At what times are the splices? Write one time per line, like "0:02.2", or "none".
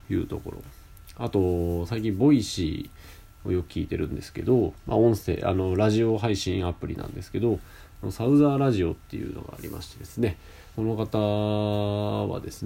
0:10.8